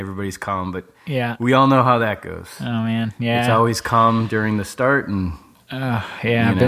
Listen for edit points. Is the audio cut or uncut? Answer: uncut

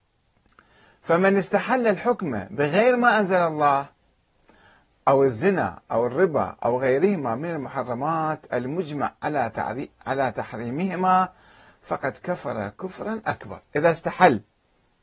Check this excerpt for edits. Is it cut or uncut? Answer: uncut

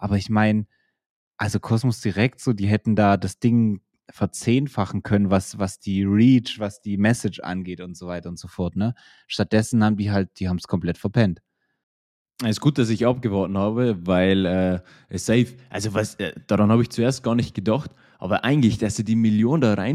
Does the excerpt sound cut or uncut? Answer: uncut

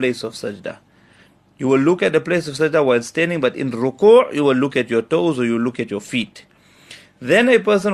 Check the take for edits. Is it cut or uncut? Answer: uncut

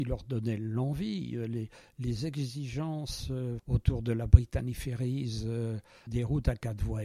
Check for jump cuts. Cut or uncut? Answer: cut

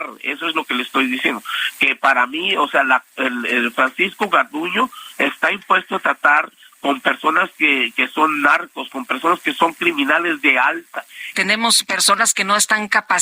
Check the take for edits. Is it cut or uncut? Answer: cut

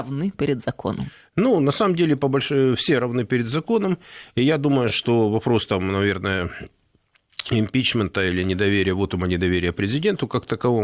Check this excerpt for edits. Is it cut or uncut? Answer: uncut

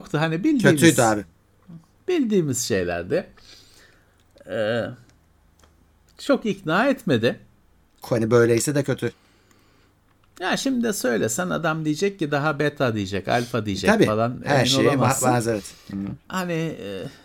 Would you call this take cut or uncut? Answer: cut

